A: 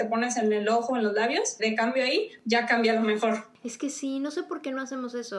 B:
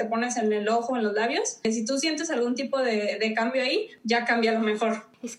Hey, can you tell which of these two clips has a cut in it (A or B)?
A